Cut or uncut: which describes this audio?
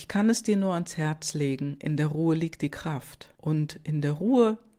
cut